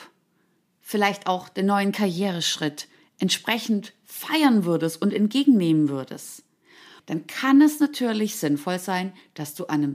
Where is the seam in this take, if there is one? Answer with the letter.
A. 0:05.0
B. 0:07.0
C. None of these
B